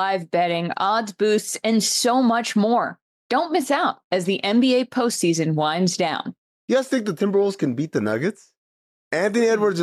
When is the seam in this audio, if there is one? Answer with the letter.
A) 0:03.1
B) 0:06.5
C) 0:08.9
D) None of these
D